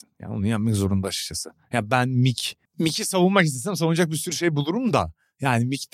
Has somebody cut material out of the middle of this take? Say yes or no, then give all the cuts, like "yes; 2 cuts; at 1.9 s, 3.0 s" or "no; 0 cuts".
yes; 1 cut; at 2.7 s